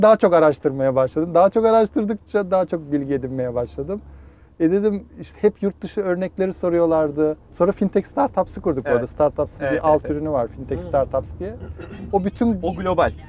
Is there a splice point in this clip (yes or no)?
yes